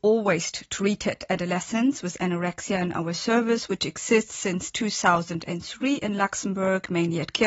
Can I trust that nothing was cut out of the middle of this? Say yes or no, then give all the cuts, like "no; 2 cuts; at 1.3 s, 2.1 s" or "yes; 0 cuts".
yes; 0 cuts